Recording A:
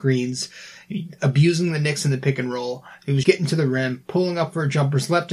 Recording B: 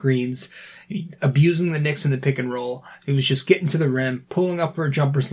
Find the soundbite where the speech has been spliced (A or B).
A